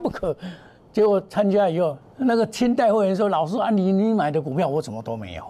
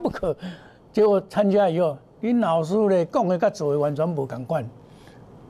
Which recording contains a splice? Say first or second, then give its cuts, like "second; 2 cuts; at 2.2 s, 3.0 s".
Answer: first; 1 cut; at 2.0 s